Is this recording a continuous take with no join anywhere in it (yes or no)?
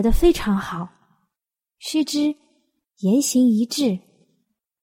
no